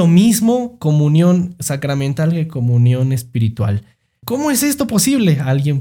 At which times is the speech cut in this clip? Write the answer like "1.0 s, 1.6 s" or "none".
4.2 s